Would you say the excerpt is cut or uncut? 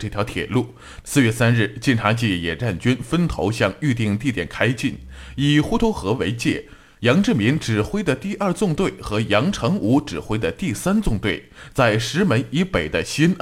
cut